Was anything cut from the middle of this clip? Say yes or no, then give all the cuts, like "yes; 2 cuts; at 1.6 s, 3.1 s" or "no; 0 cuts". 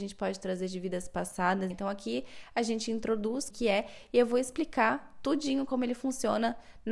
yes; 2 cuts; at 1.7 s, 3.5 s